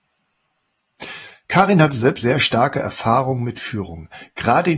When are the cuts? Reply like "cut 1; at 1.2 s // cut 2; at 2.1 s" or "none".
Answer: cut 1; at 2.2 s